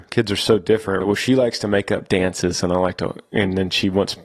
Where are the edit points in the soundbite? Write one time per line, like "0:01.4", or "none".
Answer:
0:01.0